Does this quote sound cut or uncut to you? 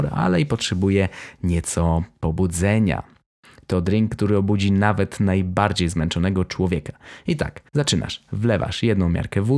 cut